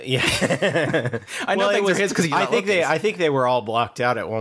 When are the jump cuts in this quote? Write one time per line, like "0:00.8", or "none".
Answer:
none